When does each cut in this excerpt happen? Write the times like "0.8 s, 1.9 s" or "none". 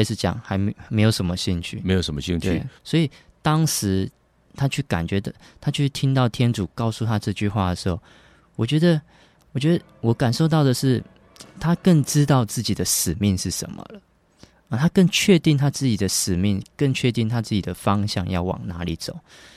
2.8 s, 4.4 s